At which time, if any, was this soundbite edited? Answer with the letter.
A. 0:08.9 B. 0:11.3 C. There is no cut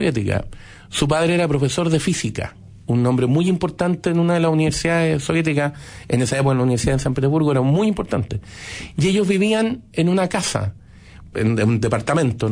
B